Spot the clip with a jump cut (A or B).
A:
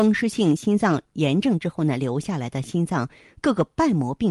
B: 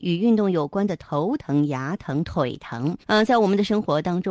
B